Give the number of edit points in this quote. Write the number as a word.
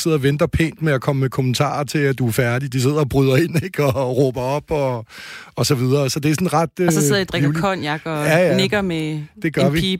zero